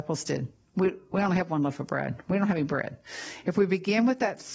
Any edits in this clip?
no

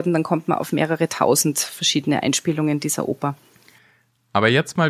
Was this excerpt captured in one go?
yes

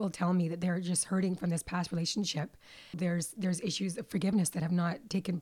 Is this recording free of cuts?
no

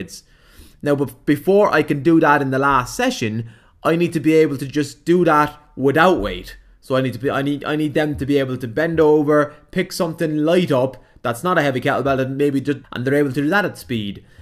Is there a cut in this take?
yes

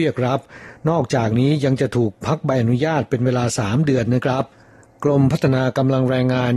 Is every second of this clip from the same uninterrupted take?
yes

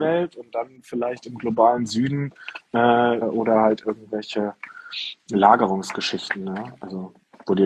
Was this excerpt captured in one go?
no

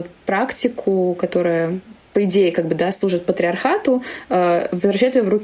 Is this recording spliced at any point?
no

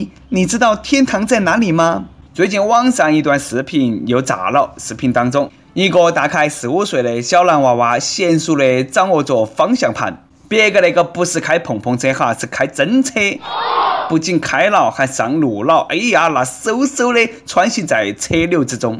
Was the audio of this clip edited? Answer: yes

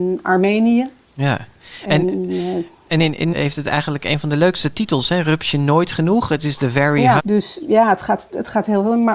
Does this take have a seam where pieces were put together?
yes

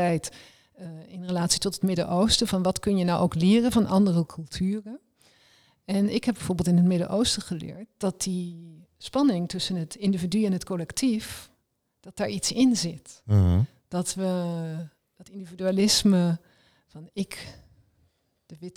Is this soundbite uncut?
yes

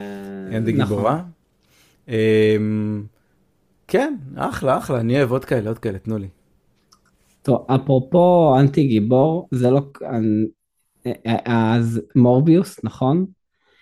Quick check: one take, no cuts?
yes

